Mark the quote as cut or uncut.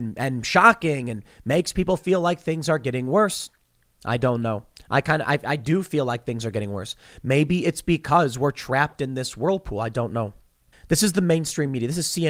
cut